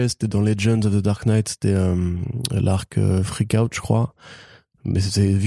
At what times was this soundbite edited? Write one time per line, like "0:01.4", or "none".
none

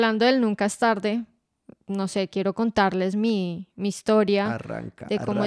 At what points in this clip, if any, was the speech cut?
none

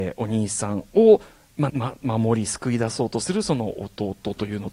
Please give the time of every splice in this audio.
0:01.7

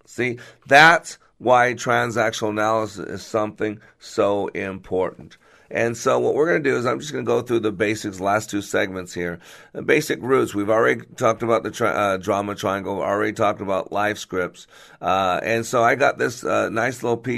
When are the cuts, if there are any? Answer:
none

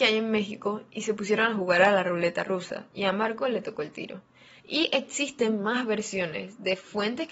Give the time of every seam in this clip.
0:04.6

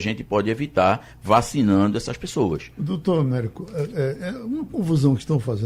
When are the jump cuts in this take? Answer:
none

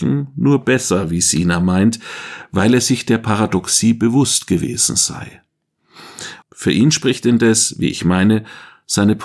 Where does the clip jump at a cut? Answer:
0:06.4

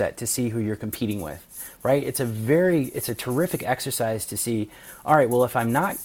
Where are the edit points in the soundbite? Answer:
none

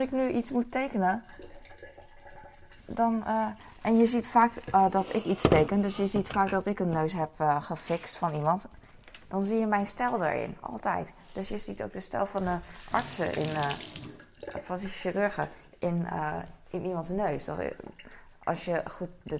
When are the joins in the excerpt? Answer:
none

